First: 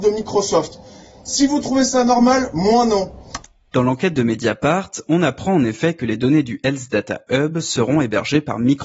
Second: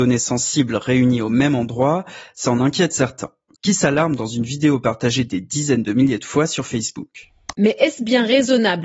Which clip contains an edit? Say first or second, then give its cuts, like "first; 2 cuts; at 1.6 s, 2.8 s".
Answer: second; 2 cuts; at 3.6 s, 7.5 s